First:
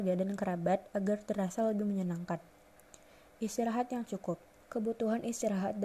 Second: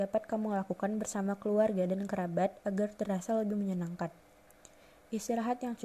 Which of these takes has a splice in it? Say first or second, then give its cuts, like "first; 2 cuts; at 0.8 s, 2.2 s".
first; 1 cut; at 4.6 s